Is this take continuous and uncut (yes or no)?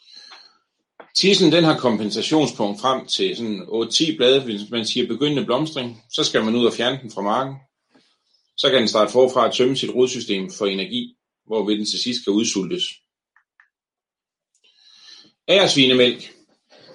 yes